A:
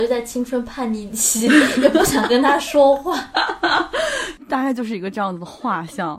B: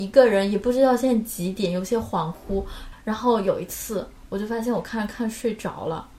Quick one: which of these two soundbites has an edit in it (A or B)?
B